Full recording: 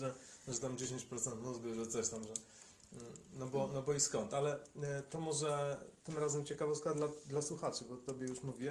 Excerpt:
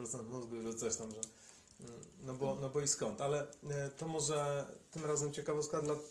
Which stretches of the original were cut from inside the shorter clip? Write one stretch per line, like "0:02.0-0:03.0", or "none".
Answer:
none

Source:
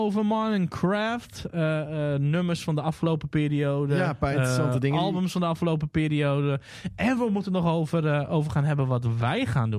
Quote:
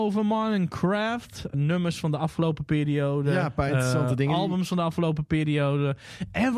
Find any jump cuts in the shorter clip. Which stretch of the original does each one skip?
0:01.5-0:02.2

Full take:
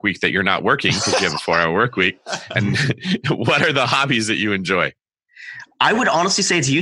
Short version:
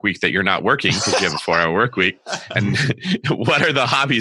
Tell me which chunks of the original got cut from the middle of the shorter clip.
none

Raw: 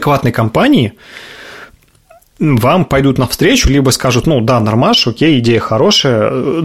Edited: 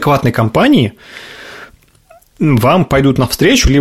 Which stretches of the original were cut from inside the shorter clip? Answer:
none

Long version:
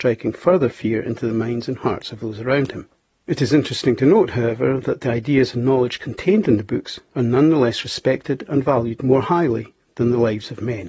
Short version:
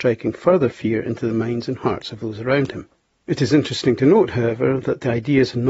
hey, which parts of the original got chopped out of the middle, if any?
none

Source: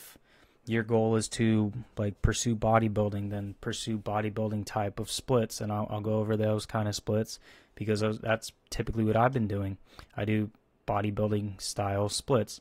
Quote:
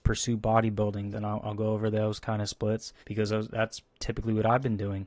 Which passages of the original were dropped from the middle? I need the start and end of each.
0:03.3-0:05.6
0:07.5-0:07.7

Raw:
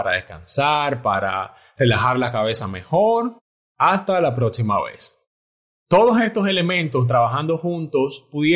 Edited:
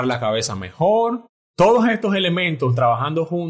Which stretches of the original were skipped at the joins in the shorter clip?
0:03.5-0:05.7

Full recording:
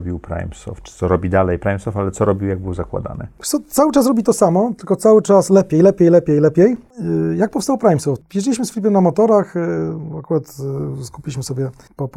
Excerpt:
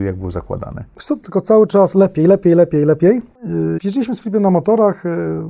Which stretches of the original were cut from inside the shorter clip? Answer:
0:03.6-0:04.8
0:07.3-0:08.3

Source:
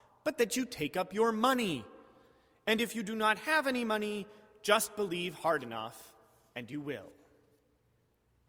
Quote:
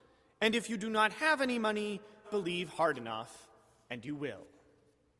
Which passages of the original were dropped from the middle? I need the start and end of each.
0:04.5-0:04.9

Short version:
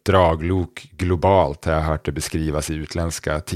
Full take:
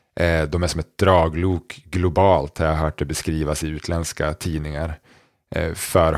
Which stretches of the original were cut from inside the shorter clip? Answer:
none

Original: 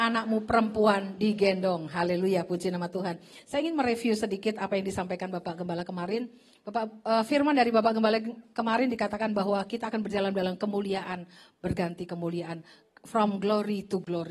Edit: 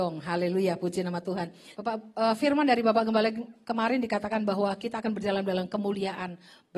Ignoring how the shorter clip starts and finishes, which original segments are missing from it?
0:03.4-0:06.6

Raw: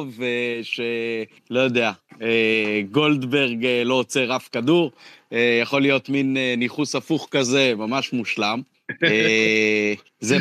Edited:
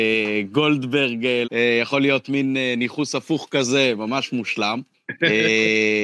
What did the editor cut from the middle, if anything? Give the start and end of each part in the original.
0:03.8-0:05.2

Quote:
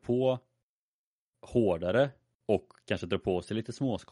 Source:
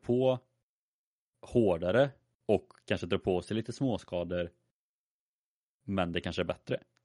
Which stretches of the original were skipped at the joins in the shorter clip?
none

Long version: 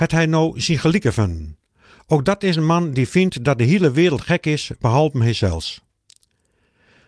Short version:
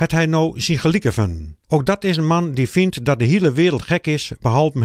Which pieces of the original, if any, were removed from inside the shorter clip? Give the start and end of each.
0:01.6-0:02.0

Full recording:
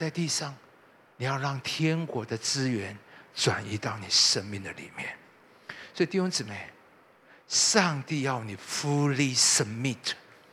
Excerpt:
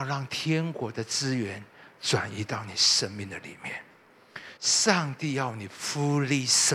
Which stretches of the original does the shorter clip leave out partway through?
0:05.9-0:07.4

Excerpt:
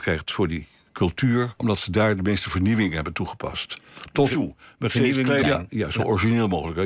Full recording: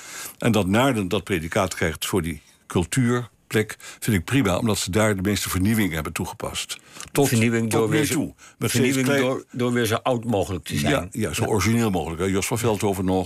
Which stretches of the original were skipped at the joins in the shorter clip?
0:03.3-0:04.6
0:07.3-0:08.1
0:09.2-0:10.8

